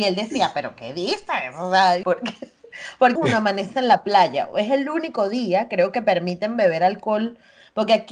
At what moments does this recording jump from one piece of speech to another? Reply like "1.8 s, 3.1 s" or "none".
2.0 s, 3.2 s